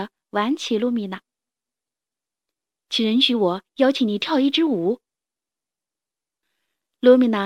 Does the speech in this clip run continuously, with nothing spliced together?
yes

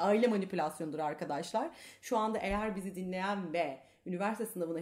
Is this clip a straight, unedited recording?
yes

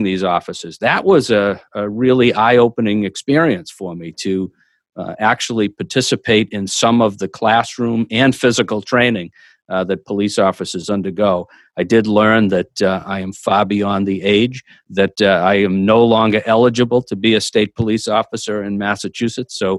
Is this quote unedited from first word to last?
yes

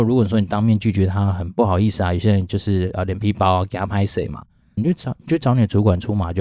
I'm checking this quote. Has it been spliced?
yes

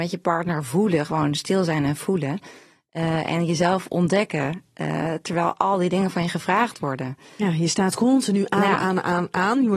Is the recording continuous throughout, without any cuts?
yes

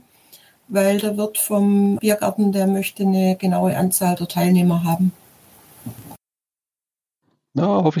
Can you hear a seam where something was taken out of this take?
yes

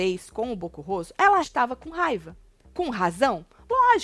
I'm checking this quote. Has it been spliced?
yes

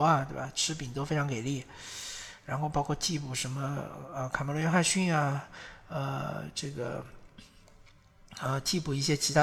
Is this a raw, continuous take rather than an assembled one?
yes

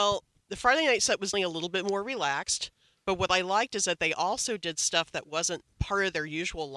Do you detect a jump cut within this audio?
yes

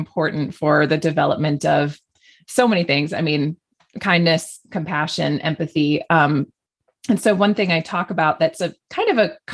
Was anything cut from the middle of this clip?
no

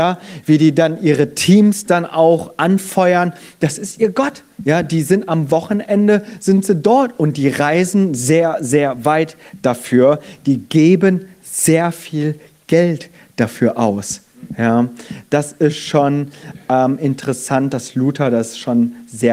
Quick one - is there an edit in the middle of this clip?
no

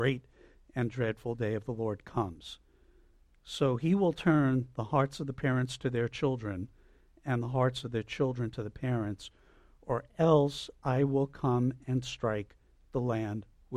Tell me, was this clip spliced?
no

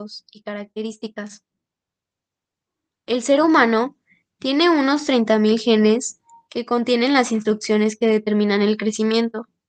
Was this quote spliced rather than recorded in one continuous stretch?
no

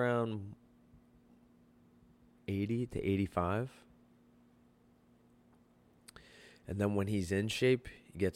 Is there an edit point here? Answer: no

